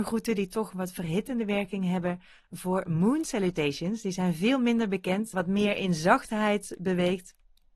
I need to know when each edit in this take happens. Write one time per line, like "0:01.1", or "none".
0:05.3